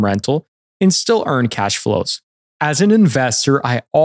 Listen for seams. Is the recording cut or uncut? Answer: uncut